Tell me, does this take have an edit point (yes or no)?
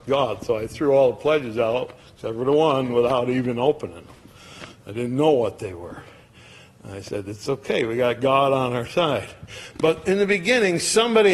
no